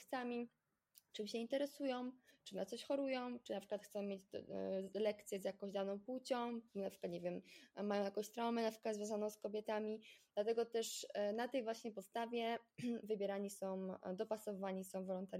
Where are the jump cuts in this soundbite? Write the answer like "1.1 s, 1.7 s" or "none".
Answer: none